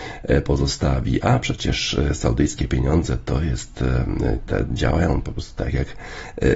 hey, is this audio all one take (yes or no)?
no